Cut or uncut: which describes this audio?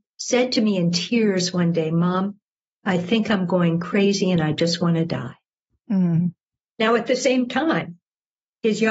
uncut